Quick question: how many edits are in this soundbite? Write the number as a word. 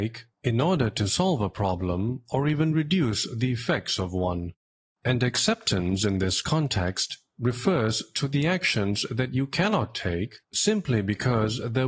zero